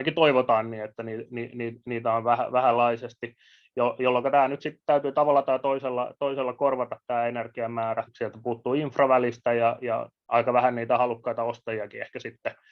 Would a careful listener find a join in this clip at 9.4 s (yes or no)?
no